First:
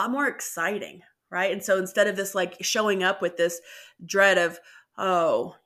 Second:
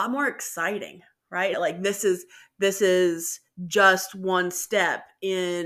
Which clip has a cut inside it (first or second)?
second